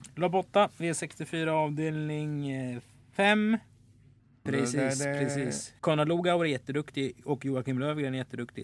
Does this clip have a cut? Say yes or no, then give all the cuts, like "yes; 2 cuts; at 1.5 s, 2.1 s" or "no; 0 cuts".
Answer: yes; 2 cuts; at 4.5 s, 5.8 s